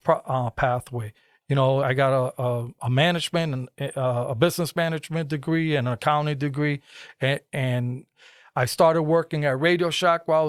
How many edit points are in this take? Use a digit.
1